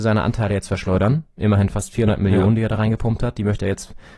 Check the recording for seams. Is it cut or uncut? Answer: uncut